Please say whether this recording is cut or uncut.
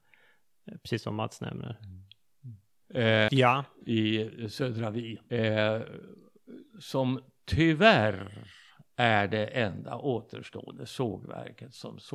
cut